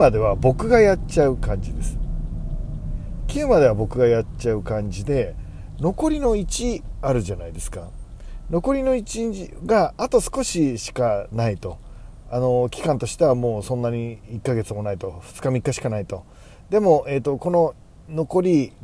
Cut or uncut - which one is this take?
uncut